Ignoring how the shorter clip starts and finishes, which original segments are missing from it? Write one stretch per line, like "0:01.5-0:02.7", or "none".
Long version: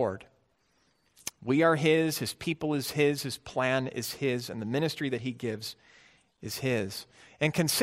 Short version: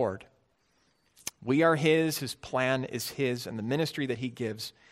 0:02.2-0:03.2